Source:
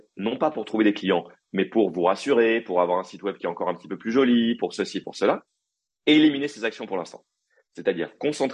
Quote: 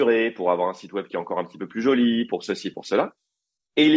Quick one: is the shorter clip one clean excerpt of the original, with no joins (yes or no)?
yes